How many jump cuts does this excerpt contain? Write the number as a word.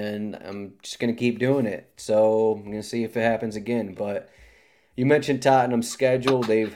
zero